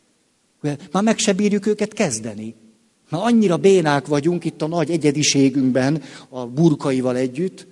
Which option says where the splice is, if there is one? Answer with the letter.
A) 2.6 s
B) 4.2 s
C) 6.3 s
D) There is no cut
C